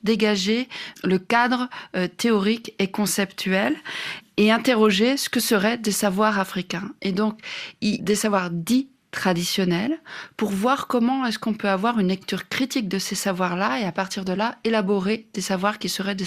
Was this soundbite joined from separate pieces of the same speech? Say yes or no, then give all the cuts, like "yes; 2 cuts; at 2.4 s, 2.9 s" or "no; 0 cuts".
yes; 1 cut; at 8.0 s